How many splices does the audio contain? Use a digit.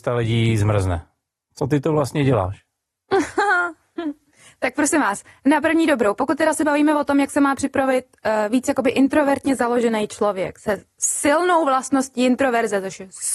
0